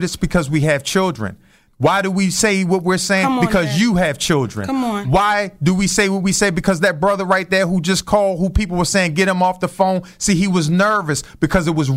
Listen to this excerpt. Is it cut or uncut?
uncut